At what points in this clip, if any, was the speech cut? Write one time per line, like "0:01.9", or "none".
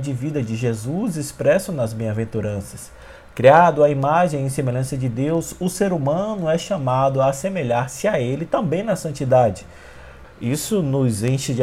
0:10.2